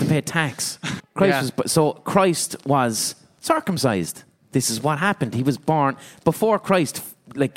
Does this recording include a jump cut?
yes; 1 cut; at 1.0 s

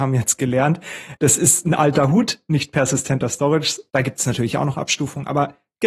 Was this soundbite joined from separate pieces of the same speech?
yes; 2 cuts; at 1.2 s, 3.9 s

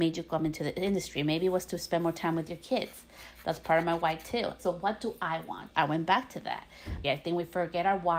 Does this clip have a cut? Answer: yes; 3 cuts; at 4.6 s, 5.7 s, 7.0 s

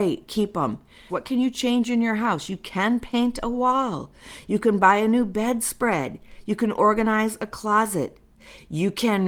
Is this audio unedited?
no; 1 cut; at 1.1 s

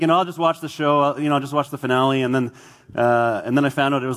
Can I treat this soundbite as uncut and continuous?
yes; 0 cuts

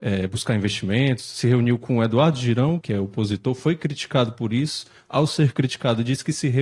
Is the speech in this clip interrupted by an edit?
yes; 1 cut; at 2.8 s

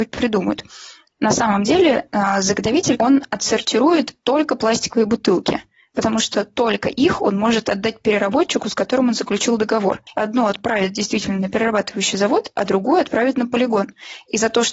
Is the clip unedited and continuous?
no; 2 cuts; at 3.0 s, 10.1 s

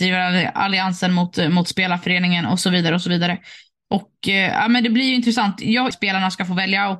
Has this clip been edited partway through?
yes; 1 cut; at 5.9 s

